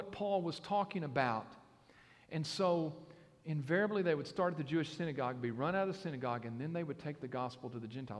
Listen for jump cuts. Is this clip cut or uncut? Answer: uncut